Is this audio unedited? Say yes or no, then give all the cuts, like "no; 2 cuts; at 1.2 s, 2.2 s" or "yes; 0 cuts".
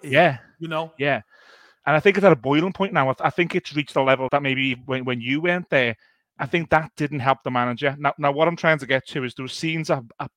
no; 1 cut; at 4.3 s